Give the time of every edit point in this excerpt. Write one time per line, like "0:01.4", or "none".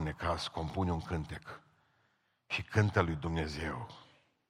none